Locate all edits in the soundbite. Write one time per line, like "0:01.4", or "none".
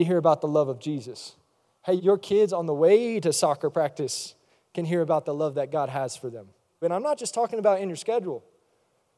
0:02.0
0:06.8

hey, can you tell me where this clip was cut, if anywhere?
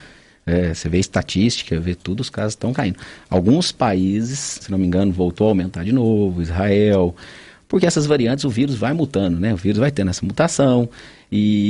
0:04.6

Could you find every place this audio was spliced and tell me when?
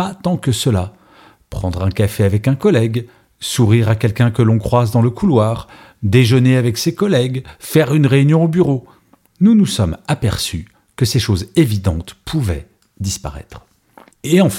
none

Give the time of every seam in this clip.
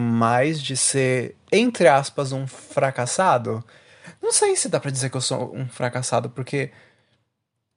none

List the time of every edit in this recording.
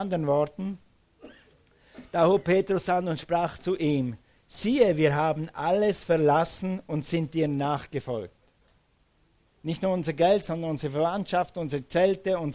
0:09.5

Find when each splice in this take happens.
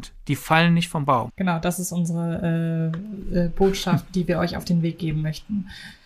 0:01.3

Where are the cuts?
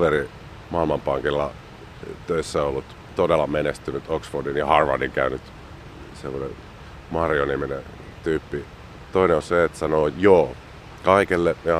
0:09.1

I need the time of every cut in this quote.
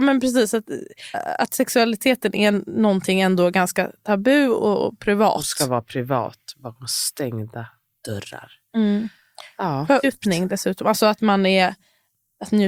0:01.1
0:10.0

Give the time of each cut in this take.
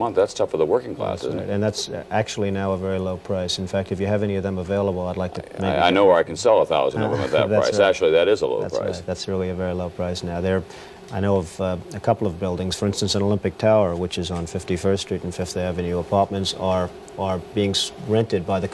none

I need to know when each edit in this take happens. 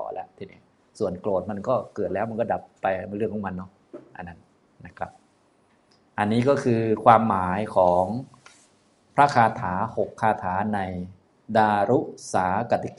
none

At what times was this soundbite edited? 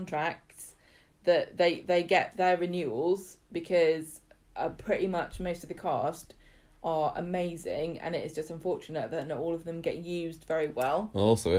none

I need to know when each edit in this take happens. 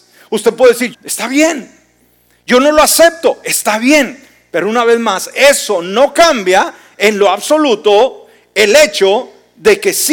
0:00.9

